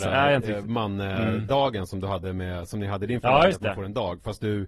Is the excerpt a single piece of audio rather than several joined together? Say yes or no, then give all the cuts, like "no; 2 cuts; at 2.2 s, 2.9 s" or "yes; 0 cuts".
yes; 0 cuts